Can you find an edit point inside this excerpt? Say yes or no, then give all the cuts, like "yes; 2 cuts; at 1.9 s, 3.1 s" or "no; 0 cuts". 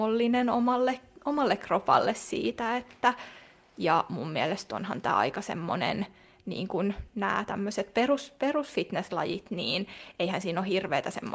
no; 0 cuts